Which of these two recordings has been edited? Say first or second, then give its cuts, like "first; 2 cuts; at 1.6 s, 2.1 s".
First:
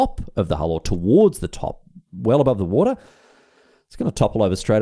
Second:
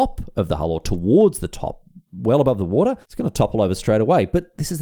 second; 1 cut; at 3.0 s